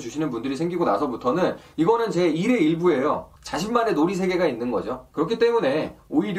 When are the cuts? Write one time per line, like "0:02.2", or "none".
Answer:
0:03.4
0:05.1